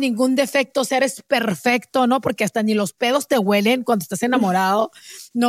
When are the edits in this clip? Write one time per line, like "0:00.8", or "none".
none